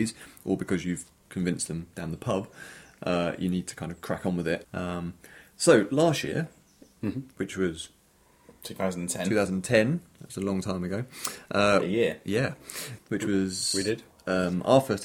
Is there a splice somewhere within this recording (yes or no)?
yes